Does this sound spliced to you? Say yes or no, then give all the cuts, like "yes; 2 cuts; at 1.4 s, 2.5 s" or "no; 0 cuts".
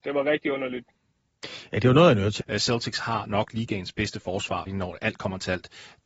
yes; 2 cuts; at 2.4 s, 4.7 s